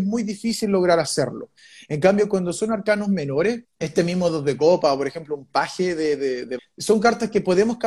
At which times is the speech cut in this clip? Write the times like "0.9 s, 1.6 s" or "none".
3.6 s, 6.6 s